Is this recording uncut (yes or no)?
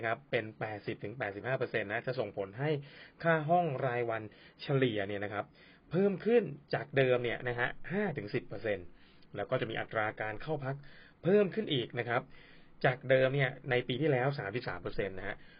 yes